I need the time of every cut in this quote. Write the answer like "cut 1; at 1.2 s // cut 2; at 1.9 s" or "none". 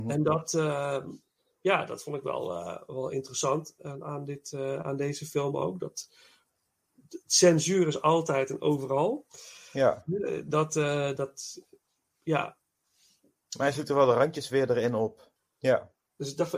cut 1; at 11.2 s // cut 2; at 15.4 s